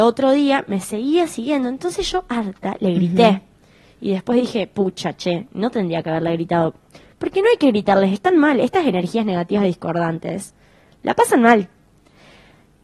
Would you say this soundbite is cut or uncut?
uncut